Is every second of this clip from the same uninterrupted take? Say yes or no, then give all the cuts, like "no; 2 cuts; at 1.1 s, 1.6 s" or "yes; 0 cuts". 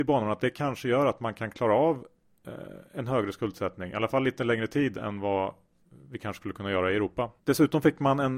no; 1 cut; at 7.4 s